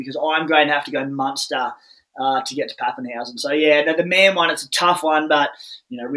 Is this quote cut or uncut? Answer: uncut